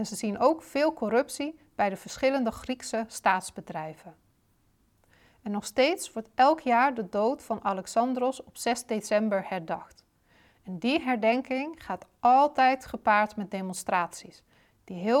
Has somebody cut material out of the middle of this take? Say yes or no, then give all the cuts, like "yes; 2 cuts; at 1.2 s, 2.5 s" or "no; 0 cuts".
no; 0 cuts